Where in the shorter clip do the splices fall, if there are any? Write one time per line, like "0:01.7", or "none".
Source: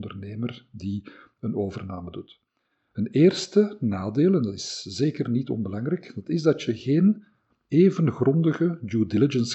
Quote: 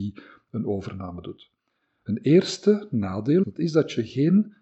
0:03.4

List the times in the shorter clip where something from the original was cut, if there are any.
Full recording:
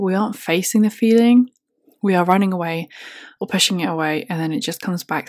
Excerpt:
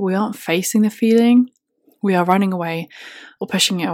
none

